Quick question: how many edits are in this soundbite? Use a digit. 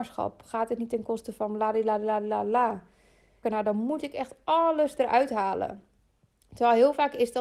1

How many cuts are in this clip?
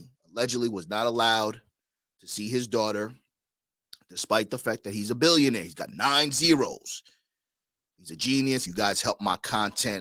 1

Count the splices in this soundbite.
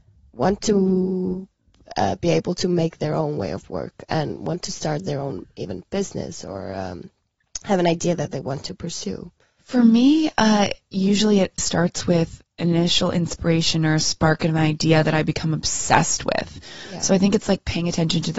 2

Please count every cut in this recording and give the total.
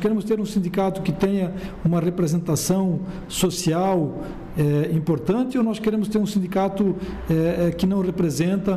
0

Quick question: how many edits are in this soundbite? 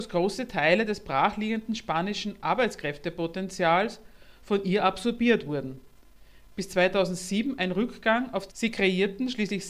1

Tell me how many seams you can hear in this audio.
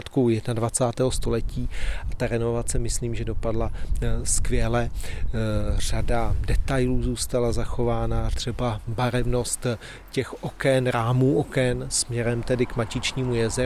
1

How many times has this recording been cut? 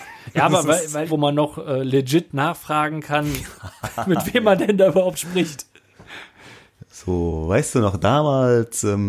1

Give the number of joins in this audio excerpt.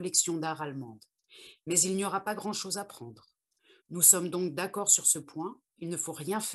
1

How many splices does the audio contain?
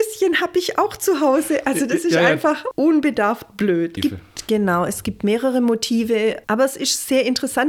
3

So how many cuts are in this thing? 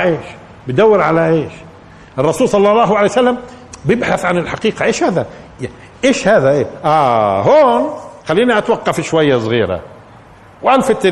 1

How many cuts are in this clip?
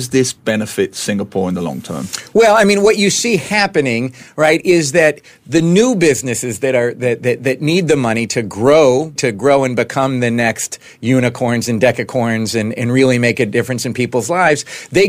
1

